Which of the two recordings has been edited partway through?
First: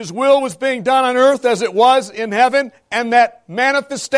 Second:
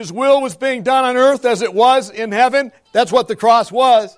second; 1 cut; at 2.8 s

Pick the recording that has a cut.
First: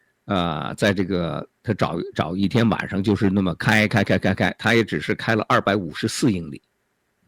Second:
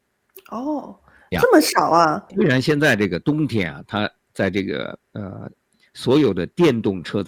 second; 2 cuts; at 2.3 s, 5.1 s

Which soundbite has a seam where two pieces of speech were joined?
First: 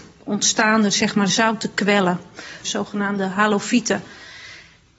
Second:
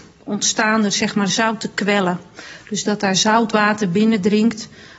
first; 1 cut; at 2.6 s

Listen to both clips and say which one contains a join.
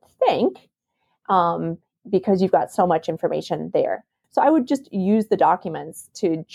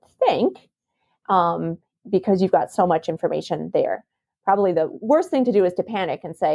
first; 1 cut; at 4.2 s

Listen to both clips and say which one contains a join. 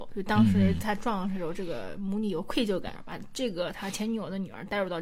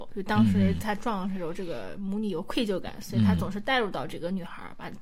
first; 1 cut; at 3.0 s

